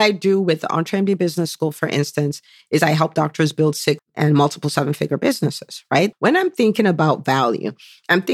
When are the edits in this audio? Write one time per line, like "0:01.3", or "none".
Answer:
0:04.0
0:06.1